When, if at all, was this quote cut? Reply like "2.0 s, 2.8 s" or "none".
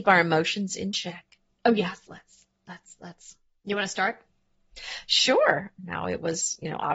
5.8 s